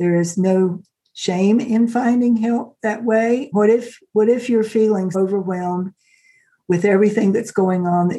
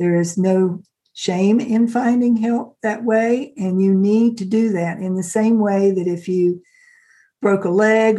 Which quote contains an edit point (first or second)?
first